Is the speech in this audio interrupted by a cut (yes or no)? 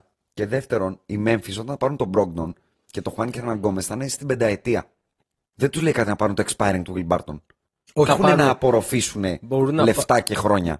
yes